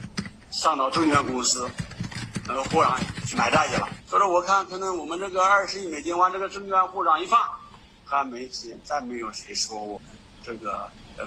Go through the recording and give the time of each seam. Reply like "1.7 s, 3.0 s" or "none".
3.3 s